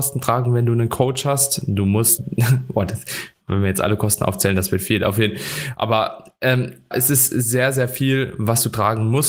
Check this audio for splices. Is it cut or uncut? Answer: cut